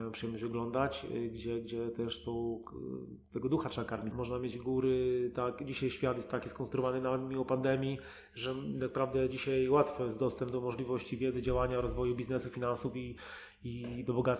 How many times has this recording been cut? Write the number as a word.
one